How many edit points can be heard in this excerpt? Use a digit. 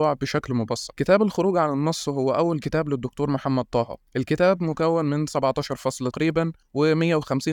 1